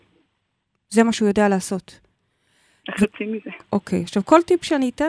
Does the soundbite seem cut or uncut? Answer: uncut